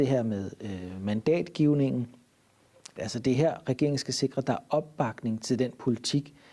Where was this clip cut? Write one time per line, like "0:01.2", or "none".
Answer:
0:03.0